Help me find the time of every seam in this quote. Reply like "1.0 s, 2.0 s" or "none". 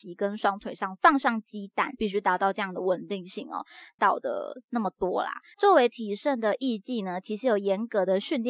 2.0 s, 4.0 s, 5.5 s